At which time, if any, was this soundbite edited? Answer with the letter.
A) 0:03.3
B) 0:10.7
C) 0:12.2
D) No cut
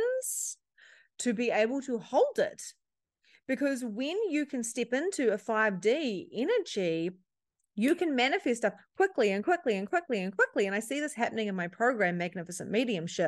D